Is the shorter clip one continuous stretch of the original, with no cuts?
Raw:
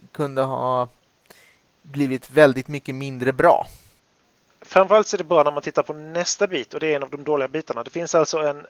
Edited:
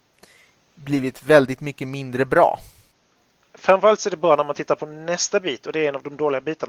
yes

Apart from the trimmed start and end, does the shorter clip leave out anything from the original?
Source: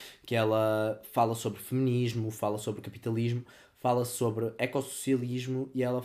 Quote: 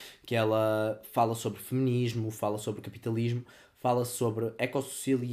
no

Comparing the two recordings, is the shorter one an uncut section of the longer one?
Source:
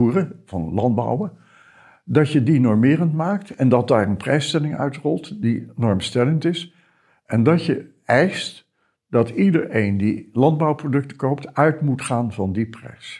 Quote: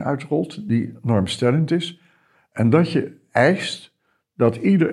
yes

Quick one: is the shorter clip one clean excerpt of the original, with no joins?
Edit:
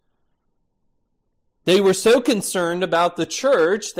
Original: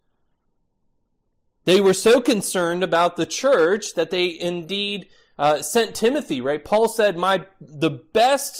yes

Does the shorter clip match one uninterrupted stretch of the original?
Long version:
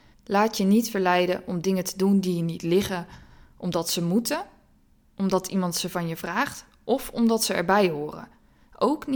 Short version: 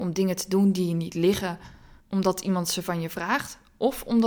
no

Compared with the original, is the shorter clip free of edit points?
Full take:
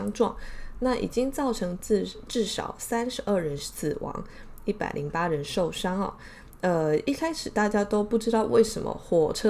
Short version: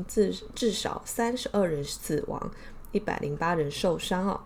yes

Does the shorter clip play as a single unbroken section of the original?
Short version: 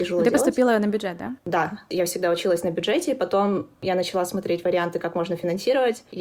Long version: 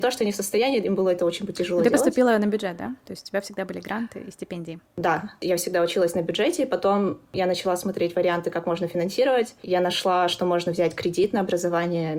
no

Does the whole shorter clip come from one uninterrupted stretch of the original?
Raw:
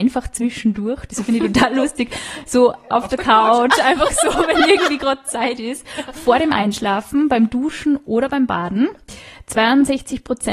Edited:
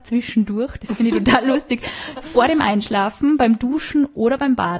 no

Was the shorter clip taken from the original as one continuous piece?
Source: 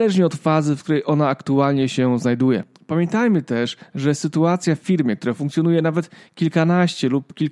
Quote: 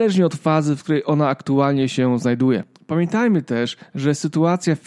yes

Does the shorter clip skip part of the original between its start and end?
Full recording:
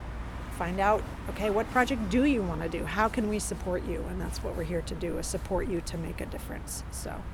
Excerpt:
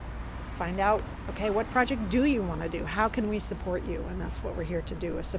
no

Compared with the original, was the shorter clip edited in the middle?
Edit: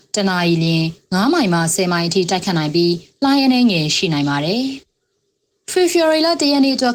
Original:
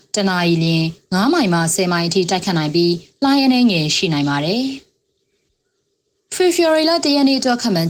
yes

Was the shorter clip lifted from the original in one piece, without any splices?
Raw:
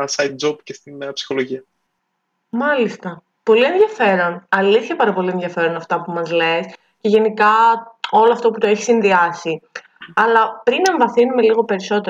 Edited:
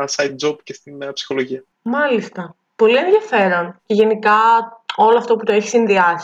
no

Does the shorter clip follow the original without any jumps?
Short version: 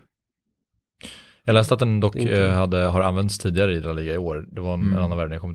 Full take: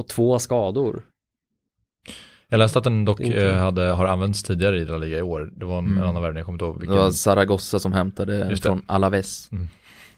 yes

